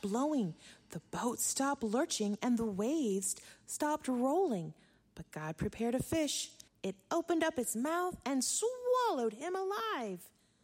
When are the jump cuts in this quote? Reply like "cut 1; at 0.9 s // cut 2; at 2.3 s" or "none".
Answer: cut 1; at 6.7 s